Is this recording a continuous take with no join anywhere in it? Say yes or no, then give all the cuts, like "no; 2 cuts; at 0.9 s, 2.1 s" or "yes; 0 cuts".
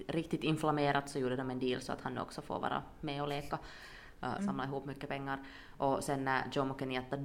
no; 1 cut; at 4.4 s